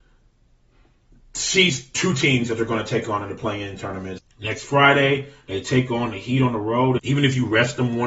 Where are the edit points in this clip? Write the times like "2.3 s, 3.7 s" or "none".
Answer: 4.2 s, 7.0 s